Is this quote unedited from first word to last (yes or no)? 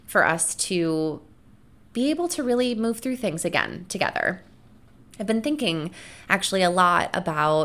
yes